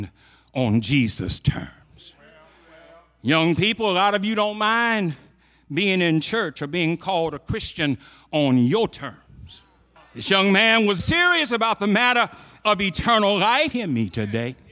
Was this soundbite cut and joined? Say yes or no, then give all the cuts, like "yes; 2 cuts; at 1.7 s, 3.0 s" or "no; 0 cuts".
yes; 3 cuts; at 10.0 s, 11.0 s, 13.7 s